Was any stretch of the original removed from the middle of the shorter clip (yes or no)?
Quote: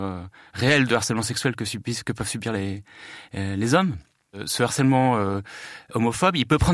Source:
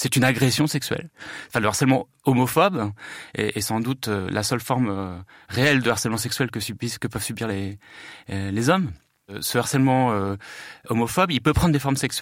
no